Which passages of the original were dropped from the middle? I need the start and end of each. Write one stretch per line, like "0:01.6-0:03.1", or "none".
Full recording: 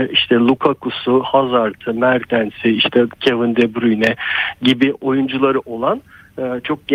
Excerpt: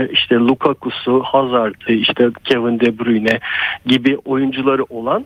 0:01.9-0:02.6

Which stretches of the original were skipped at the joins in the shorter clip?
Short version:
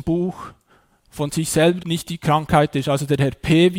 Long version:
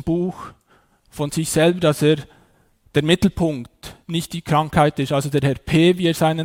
0:01.8-0:04.0

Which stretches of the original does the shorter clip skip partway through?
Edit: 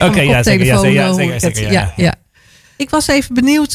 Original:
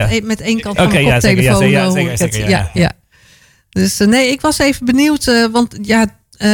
0:03.6-0:04.3

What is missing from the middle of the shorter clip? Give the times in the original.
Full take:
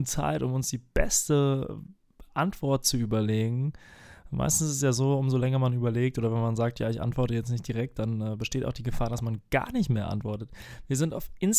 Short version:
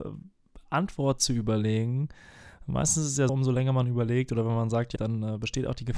0:04.9-0:05.2
0:06.8-0:07.9

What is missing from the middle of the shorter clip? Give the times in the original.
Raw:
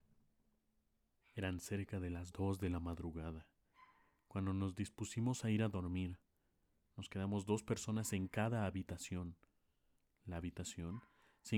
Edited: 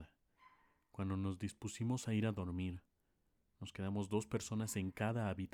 none

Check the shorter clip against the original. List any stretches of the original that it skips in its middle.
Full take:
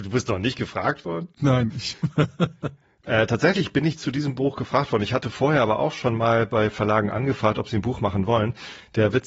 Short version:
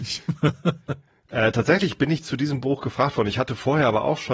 none

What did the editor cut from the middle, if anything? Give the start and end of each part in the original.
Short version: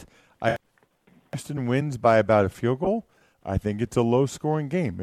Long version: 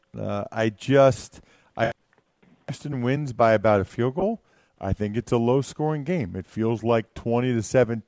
none

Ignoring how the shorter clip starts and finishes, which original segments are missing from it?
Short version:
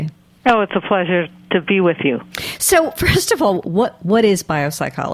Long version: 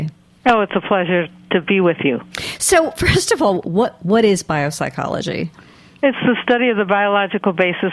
none

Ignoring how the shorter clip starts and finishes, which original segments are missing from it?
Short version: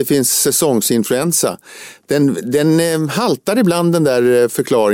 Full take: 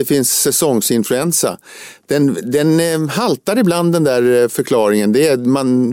none

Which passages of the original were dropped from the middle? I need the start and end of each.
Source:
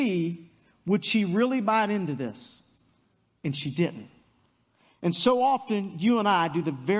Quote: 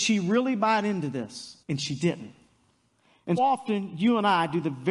0:02.7-0:03.4
0:05.1-0:05.4

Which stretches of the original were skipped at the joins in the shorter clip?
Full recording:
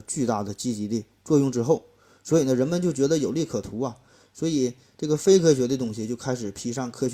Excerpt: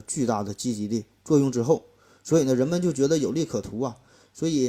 none

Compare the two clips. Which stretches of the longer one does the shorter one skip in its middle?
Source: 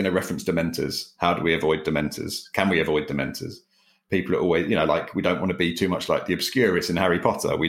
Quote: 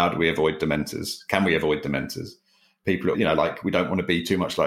0:04.4-0:04.6

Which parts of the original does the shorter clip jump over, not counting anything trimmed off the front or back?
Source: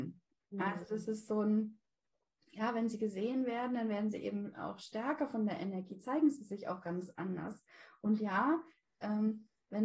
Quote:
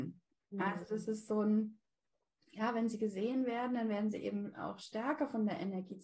none

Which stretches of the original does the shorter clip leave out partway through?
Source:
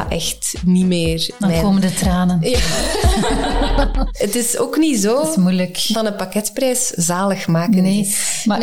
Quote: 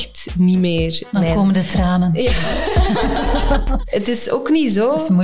none

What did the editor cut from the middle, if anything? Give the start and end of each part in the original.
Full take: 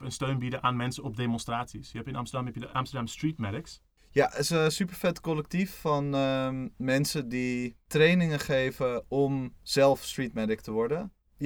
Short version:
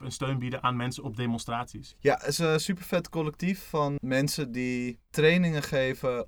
0:01.9-0:04.0
0:06.1-0:06.7

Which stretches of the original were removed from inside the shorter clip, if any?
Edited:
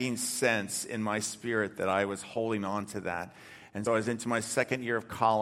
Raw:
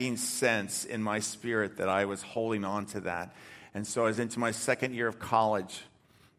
0:03.9-0:04.0

